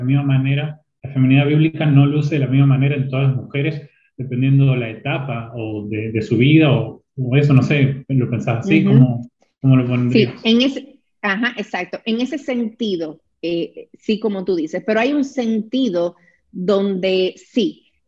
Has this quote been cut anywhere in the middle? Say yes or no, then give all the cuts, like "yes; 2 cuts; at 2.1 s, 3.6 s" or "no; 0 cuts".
no; 0 cuts